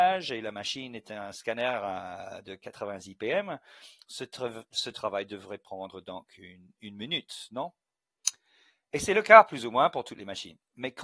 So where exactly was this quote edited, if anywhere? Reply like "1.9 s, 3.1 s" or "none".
none